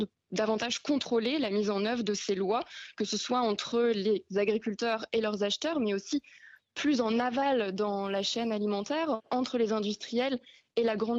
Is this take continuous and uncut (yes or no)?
yes